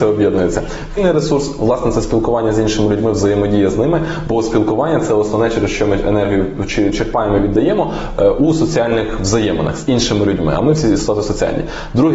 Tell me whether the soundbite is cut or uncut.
cut